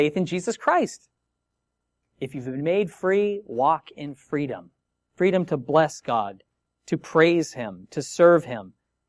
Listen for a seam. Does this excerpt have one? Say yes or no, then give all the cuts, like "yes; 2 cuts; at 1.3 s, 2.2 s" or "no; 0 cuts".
yes; 1 cut; at 2.0 s